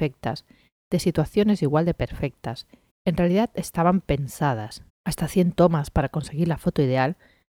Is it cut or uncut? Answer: cut